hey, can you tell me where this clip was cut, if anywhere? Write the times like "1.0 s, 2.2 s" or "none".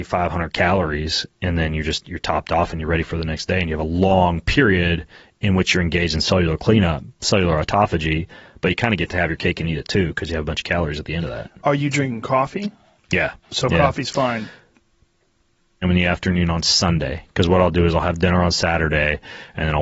13.4 s, 15.8 s